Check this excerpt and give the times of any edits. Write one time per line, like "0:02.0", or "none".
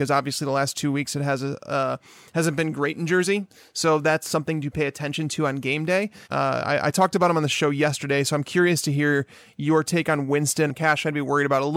0:06.2
0:10.7